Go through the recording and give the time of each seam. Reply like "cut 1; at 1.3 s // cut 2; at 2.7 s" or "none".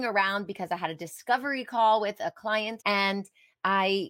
cut 1; at 2.8 s